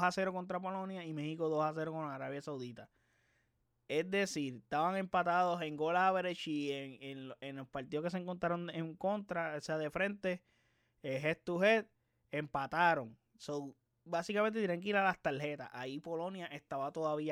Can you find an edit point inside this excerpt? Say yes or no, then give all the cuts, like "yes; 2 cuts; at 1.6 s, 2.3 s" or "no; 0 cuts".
no; 0 cuts